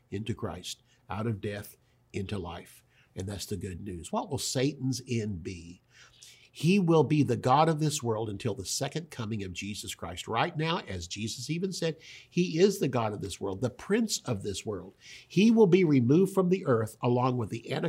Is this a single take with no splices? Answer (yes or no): yes